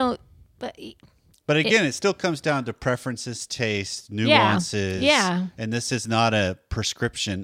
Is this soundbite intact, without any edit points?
yes; 0 cuts

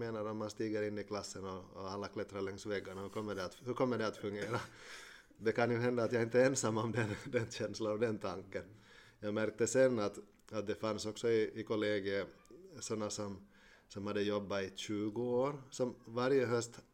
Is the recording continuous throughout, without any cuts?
yes; 0 cuts

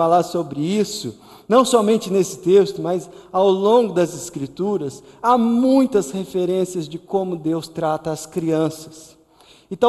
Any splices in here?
no; 0 cuts

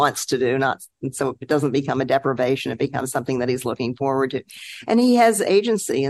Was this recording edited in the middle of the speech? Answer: no; 0 cuts

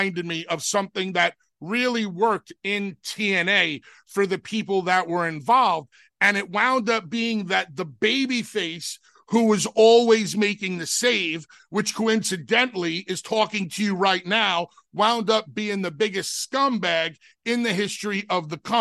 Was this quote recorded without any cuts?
yes; 0 cuts

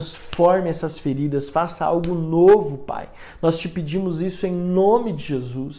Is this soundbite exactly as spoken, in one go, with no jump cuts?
yes; 0 cuts

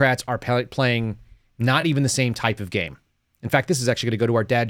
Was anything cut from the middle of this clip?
no; 0 cuts

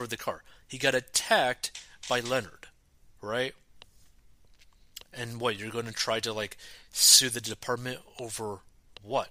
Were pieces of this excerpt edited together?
no; 0 cuts

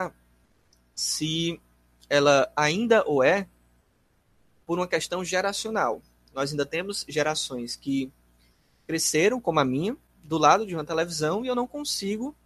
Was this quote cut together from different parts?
no; 0 cuts

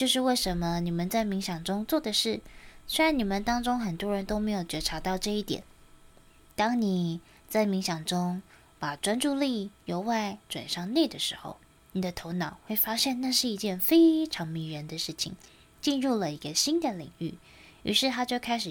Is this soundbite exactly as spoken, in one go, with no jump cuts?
yes; 0 cuts

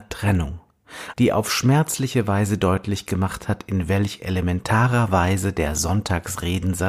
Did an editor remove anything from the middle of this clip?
yes; 1 cut; at 1.1 s

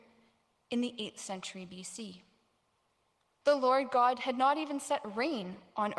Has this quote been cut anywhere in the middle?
yes; 1 cut; at 3.4 s

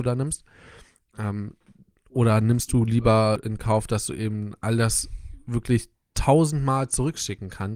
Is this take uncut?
yes; 0 cuts

